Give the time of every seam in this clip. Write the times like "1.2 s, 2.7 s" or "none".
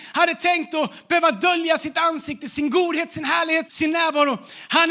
3.7 s